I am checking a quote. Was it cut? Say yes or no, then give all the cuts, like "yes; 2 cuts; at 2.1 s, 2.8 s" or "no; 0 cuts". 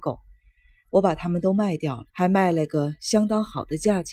yes; 1 cut; at 2.1 s